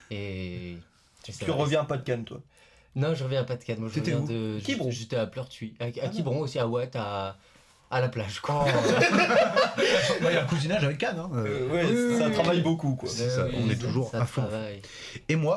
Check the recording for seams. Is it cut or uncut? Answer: uncut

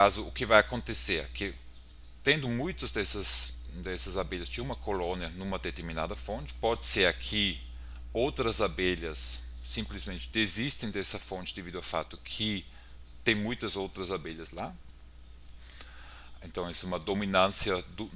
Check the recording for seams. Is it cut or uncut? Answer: uncut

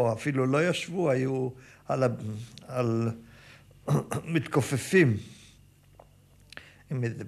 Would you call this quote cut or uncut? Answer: uncut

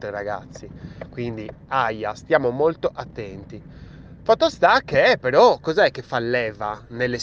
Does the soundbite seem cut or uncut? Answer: uncut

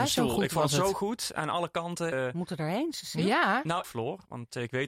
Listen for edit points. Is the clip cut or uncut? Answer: cut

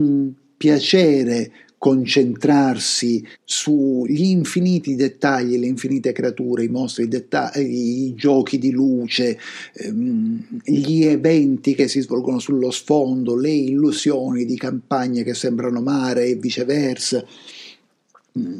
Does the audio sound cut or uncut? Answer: cut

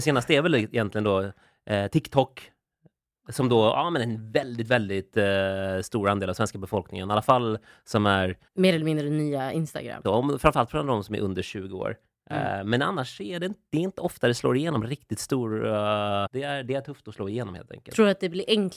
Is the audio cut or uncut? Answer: cut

